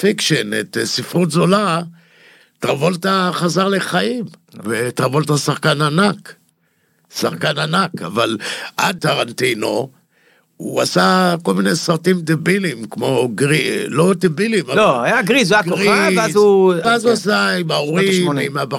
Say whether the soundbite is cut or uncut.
cut